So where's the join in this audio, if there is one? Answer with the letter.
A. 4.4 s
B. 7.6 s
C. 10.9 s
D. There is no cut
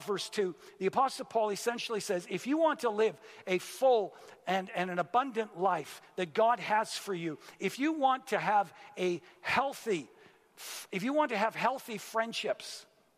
D